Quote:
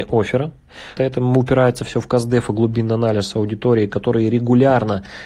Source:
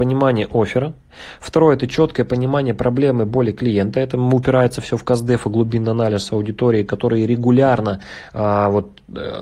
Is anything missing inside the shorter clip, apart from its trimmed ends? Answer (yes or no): yes